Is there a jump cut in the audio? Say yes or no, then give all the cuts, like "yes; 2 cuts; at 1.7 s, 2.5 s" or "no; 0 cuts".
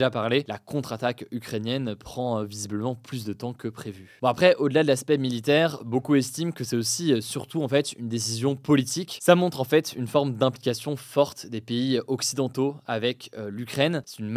no; 0 cuts